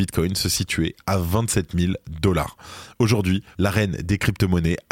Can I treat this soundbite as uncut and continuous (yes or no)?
no